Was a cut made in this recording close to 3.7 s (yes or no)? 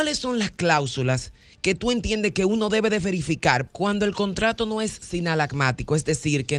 yes